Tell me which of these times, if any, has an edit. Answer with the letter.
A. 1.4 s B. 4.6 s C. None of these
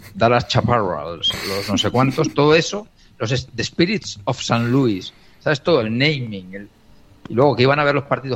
C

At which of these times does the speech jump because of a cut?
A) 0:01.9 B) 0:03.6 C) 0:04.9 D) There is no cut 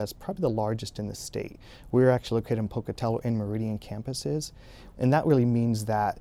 C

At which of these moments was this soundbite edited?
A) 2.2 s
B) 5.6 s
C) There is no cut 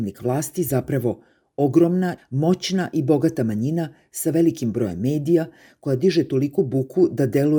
A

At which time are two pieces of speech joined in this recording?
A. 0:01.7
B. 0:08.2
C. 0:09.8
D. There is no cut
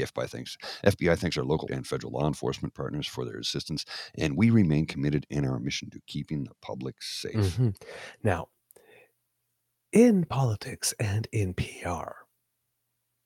A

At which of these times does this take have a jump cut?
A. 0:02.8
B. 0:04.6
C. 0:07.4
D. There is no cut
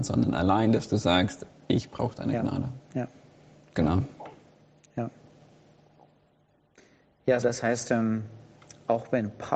C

